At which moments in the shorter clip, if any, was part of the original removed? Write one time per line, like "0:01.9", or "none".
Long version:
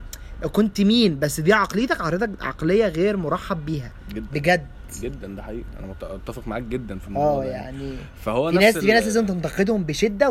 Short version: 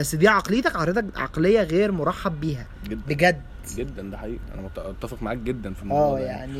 none